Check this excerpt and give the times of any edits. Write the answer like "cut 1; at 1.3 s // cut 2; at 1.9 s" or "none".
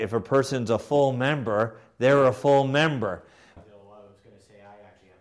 cut 1; at 3.6 s